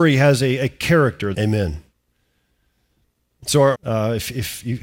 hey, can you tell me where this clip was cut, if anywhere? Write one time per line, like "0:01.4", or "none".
0:01.3
0:03.7

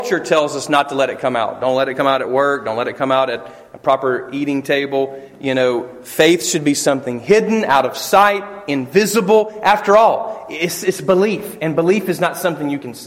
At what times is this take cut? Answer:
none

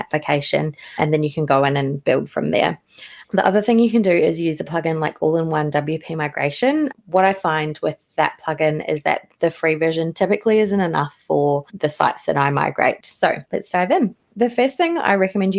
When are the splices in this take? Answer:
0:13.0

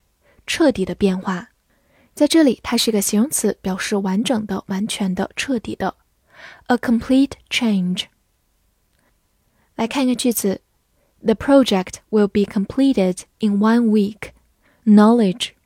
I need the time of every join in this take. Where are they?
0:14.7

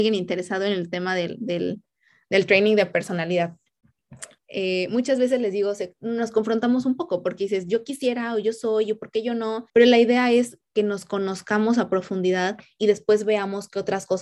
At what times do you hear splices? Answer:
0:04.4
0:09.7

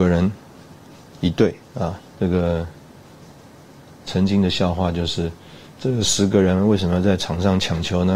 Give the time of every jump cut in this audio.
0:02.1

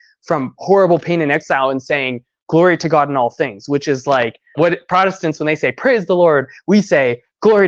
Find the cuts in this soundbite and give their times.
0:04.5

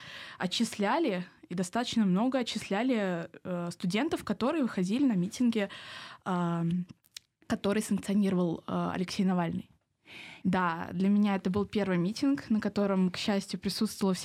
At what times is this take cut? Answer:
0:10.4

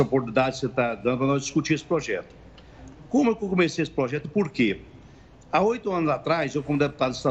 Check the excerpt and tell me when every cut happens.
none

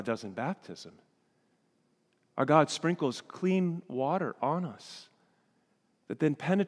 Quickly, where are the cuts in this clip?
none

